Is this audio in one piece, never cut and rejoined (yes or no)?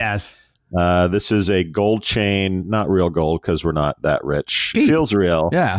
no